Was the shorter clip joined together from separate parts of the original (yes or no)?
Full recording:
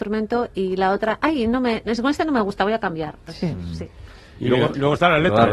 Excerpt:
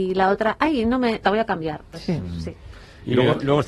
yes